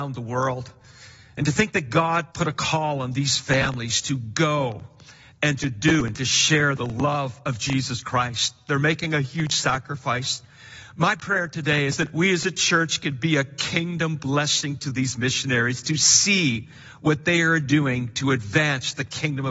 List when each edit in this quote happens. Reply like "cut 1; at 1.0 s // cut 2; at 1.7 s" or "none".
cut 1; at 2.3 s